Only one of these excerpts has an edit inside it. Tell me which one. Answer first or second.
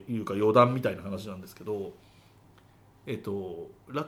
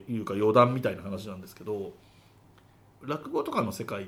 second